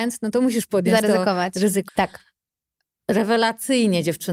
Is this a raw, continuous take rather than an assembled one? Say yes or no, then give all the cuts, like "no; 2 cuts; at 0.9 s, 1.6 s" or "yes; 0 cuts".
no; 1 cut; at 1.9 s